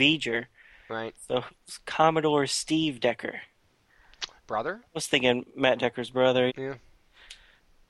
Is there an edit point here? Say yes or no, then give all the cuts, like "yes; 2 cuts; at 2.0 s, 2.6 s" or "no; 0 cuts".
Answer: yes; 2 cuts; at 4.4 s, 6.5 s